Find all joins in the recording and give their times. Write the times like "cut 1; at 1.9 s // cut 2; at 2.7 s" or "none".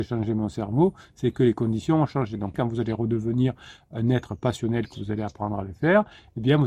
cut 1; at 2.5 s